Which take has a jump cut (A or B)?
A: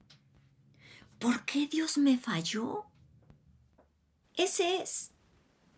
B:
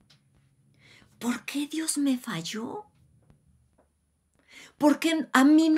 A